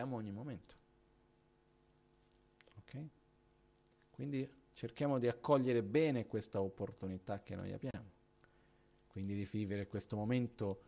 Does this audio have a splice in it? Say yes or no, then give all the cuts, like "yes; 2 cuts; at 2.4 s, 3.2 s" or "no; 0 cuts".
no; 0 cuts